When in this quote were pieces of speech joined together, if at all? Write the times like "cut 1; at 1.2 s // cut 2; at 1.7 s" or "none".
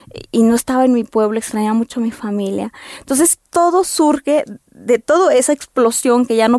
none

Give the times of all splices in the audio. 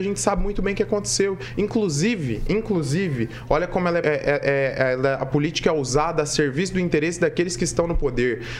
cut 1; at 4.0 s

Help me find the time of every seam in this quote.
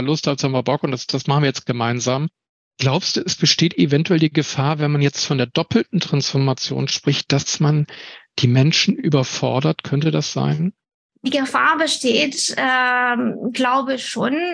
none

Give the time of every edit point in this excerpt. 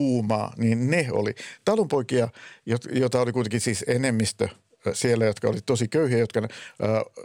none

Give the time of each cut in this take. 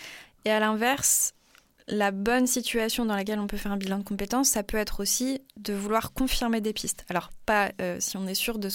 none

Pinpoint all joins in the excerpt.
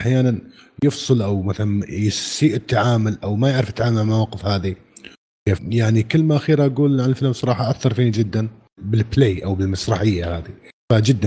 cut 1; at 5.6 s // cut 2; at 8.8 s

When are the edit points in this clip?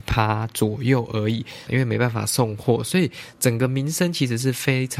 cut 1; at 1.7 s

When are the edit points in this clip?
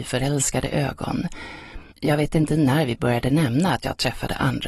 cut 1; at 1.9 s

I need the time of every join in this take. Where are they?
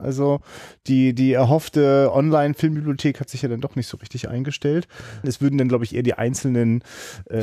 cut 1; at 5.2 s

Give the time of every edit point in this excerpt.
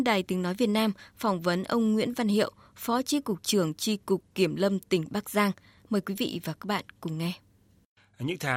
none

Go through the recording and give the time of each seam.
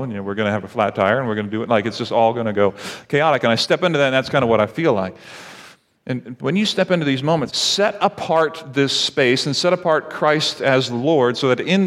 cut 1; at 6.4 s // cut 2; at 7.5 s

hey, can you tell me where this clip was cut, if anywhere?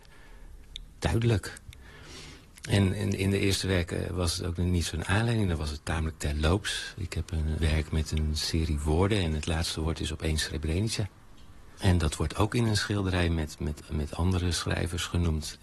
cut 1; at 7.6 s // cut 2; at 11.8 s

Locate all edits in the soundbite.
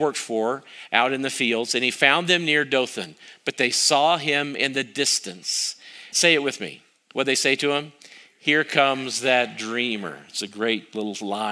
cut 1; at 6.1 s

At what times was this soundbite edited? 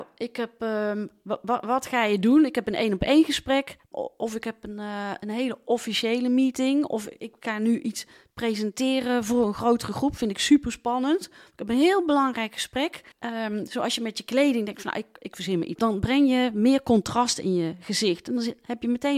cut 1; at 13.1 s // cut 2; at 15.8 s

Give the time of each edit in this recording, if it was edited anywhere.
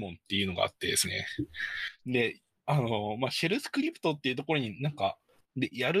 cut 1; at 2.0 s

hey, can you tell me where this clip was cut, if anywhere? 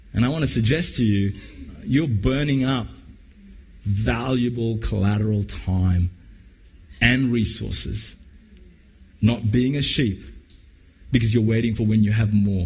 none

